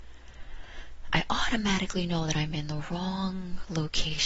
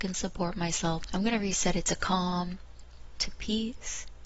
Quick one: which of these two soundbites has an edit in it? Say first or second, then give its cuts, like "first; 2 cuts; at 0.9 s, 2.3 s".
second; 2 cuts; at 1.1 s, 3.1 s